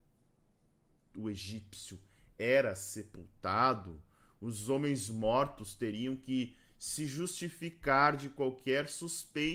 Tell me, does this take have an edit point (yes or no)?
yes